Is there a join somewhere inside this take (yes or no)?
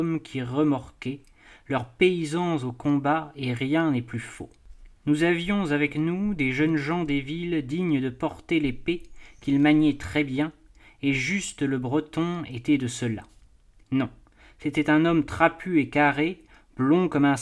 yes